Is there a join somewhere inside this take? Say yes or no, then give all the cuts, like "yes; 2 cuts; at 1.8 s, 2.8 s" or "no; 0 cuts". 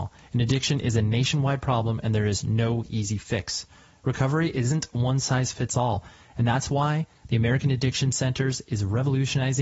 no; 0 cuts